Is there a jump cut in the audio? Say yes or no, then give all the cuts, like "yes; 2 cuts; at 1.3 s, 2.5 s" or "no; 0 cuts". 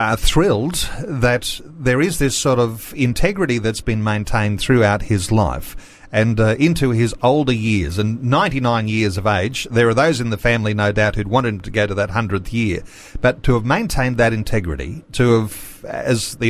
no; 0 cuts